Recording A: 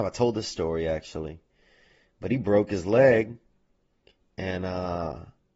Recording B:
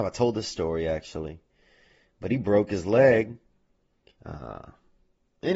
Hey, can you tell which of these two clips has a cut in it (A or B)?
B